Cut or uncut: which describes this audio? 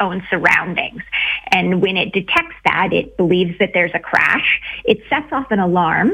uncut